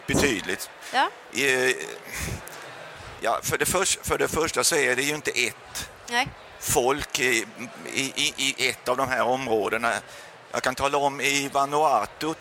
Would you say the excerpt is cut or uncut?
uncut